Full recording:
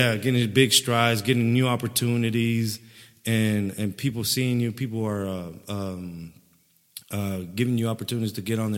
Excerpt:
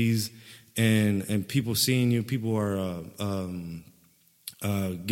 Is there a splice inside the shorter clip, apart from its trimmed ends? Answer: no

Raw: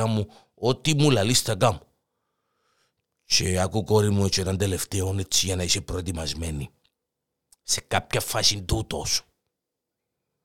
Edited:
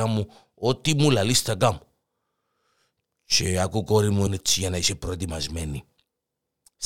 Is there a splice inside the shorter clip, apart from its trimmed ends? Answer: yes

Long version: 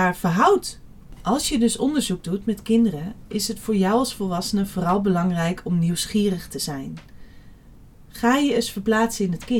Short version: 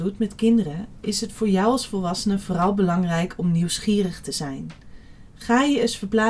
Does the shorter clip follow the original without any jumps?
no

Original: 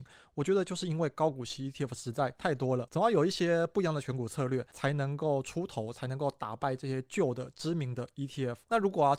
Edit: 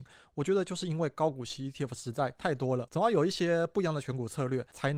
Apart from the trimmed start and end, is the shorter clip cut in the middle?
no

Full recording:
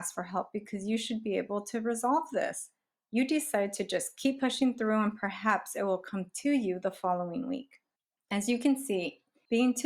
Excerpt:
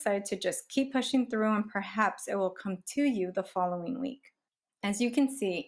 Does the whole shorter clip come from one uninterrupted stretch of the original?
yes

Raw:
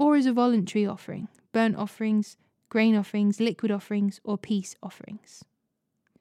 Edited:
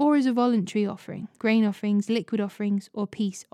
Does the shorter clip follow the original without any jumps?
no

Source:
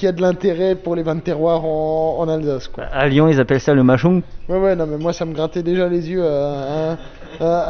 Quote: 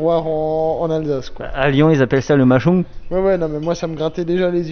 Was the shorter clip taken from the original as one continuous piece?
yes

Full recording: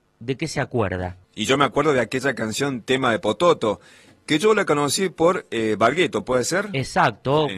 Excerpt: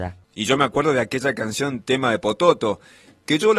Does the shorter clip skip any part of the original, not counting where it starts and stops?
no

